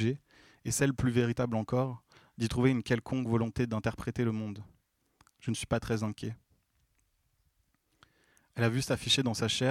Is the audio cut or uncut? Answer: uncut